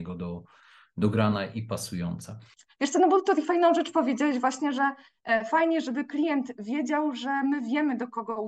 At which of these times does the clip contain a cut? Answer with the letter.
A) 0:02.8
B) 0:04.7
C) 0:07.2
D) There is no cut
D